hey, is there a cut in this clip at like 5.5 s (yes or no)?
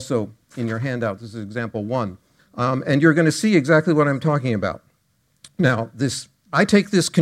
no